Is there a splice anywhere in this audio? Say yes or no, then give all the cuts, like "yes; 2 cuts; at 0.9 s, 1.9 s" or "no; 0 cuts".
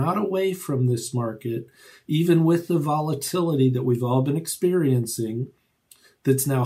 no; 0 cuts